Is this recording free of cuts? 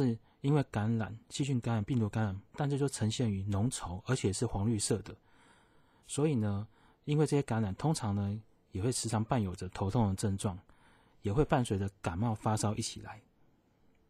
no; 1 cut; at 2.5 s

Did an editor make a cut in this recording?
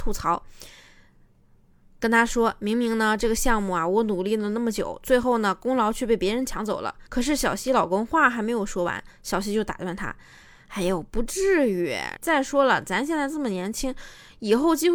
yes; 2 cuts; at 7.1 s, 12.2 s

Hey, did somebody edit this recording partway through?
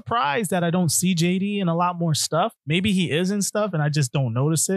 yes; 1 cut; at 2.6 s

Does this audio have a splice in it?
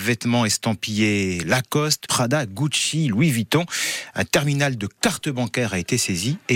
yes; 1 cut; at 2.1 s

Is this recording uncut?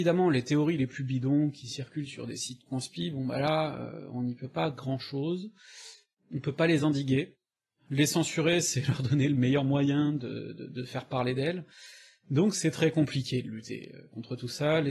yes; 0 cuts

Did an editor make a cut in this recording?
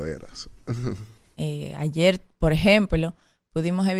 yes; 1 cut; at 1.3 s

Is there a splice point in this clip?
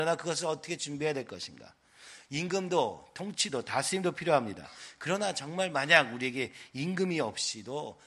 no; 0 cuts

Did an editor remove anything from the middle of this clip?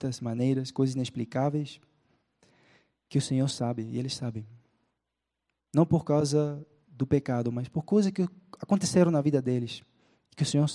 no; 0 cuts

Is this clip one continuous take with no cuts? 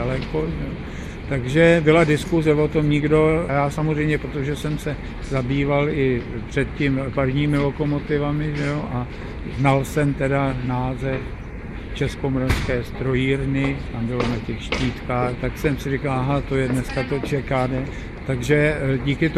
no; 2 cuts; at 3.5 s, 15.4 s

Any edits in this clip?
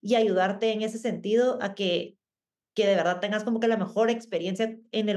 no; 0 cuts

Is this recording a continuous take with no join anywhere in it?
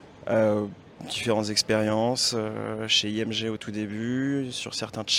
yes; 0 cuts

